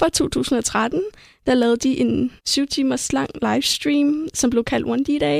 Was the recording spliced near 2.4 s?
yes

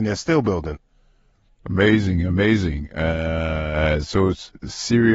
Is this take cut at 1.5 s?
yes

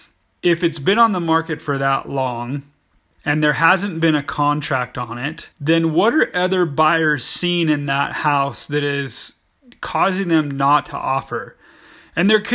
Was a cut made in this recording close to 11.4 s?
no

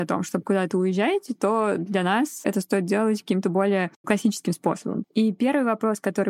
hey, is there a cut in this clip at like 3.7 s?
no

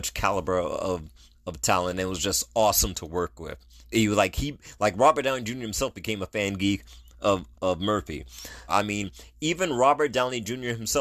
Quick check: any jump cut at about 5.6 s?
no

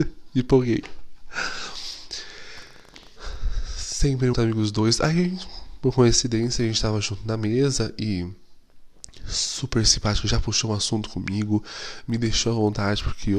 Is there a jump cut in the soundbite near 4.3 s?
yes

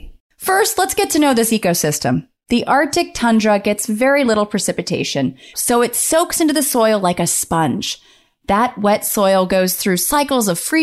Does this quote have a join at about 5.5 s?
yes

